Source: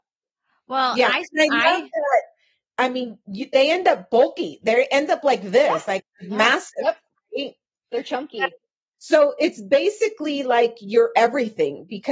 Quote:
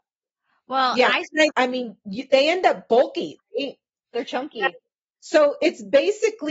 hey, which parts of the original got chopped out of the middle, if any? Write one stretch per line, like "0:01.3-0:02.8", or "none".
0:01.5-0:02.7
0:04.6-0:07.2